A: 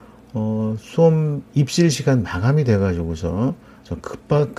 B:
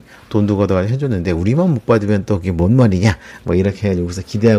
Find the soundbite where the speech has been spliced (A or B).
A